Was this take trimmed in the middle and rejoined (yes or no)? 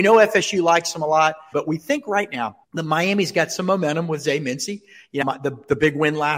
yes